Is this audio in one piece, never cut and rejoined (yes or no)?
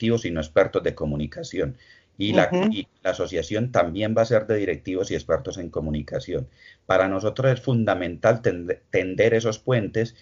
yes